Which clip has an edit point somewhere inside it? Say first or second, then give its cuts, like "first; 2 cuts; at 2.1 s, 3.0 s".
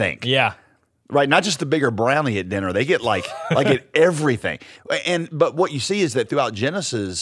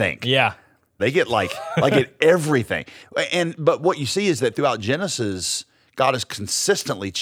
second; 1 cut; at 1.0 s